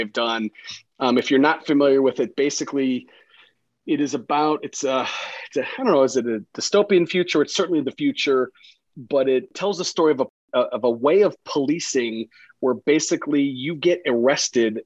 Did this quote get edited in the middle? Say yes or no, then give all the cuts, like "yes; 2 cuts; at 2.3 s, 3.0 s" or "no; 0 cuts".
no; 0 cuts